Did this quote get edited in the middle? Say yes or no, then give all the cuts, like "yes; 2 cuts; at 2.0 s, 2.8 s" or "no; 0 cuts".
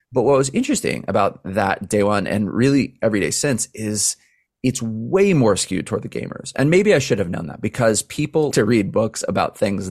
yes; 1 cut; at 8.5 s